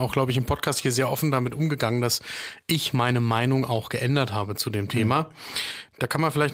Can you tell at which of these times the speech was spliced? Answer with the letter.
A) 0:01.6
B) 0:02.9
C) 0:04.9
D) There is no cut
D